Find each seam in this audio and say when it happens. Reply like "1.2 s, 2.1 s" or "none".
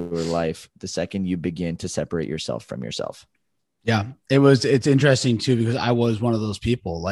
none